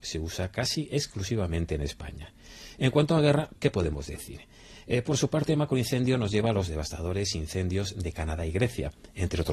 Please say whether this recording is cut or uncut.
uncut